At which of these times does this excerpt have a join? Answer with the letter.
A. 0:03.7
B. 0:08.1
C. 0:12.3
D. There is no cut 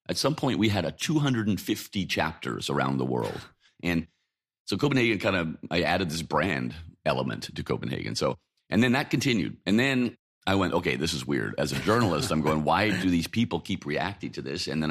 A